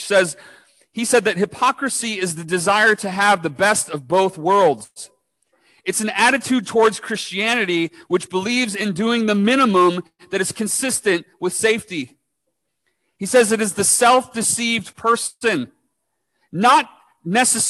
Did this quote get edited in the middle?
no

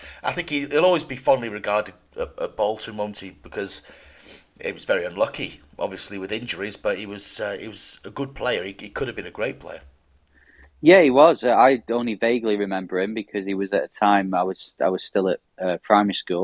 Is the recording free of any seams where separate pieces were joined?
yes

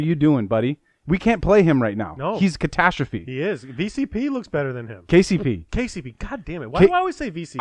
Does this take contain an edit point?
no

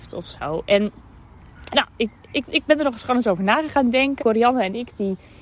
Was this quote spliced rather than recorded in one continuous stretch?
yes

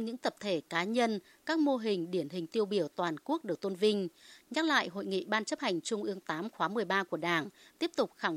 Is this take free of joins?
yes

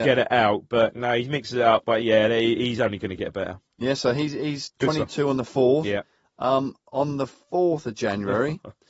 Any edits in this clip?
no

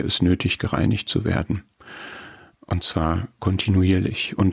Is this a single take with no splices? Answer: yes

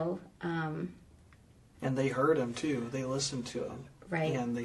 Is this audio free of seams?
no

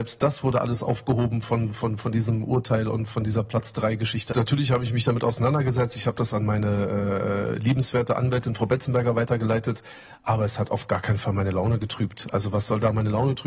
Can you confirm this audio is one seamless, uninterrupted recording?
no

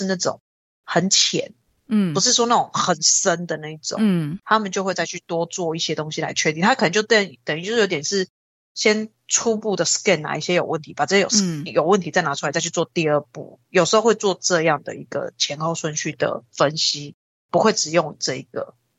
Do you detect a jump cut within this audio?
no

